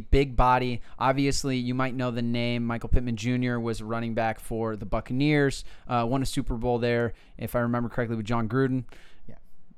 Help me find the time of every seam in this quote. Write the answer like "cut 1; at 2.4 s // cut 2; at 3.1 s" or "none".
none